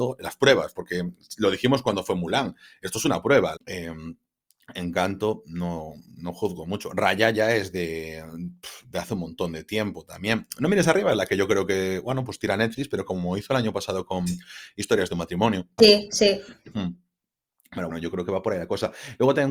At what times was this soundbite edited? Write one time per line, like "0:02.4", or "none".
0:03.6
0:15.8
0:17.9